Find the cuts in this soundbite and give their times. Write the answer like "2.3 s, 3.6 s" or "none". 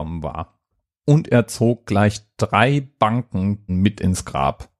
3.7 s